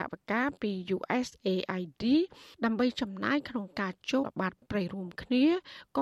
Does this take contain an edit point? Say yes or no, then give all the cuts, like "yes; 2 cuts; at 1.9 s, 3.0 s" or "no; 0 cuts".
yes; 1 cut; at 4.2 s